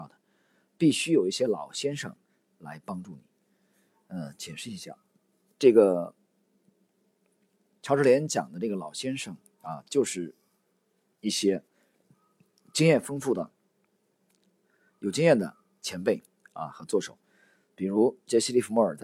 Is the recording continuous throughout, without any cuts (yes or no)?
yes